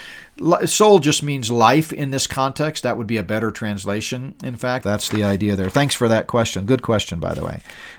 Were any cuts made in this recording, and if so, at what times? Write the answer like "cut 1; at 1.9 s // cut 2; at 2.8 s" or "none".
cut 1; at 4.8 s